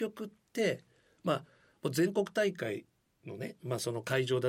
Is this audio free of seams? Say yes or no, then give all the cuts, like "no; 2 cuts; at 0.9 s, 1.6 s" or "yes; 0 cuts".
yes; 0 cuts